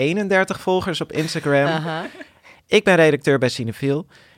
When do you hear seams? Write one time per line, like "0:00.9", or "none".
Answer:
0:02.5